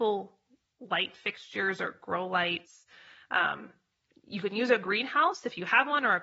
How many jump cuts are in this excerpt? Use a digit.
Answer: 0